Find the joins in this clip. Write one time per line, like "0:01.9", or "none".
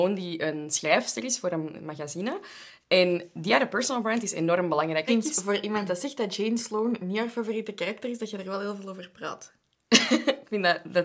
0:05.1